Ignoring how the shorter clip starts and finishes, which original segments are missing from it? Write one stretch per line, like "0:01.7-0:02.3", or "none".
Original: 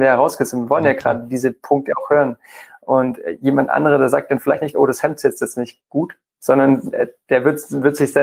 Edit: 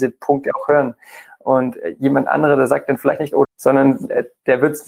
0:04.9-0:06.3